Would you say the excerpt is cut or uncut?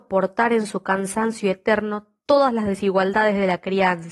uncut